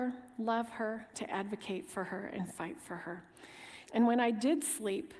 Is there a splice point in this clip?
yes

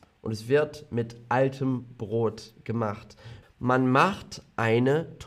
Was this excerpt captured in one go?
no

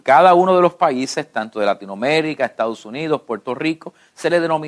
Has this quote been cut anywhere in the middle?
no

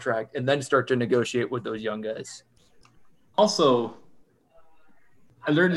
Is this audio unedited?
yes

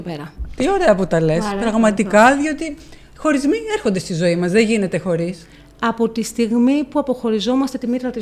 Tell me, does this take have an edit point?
no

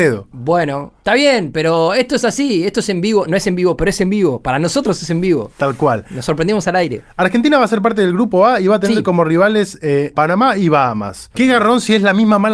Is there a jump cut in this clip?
yes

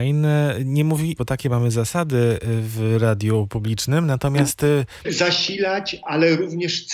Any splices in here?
yes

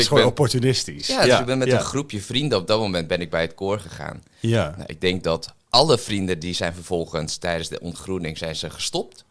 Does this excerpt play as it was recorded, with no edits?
yes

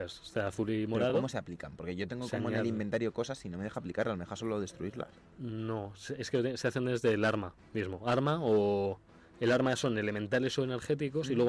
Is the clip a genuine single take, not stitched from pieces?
yes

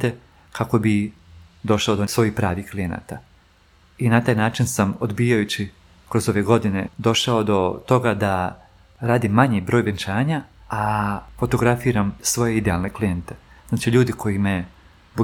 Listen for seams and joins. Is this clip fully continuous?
no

